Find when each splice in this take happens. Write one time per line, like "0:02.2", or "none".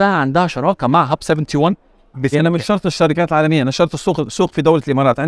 0:02.3